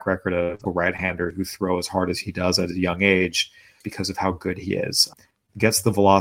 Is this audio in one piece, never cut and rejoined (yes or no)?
no